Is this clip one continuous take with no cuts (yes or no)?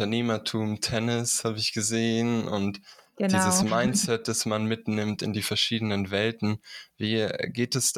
yes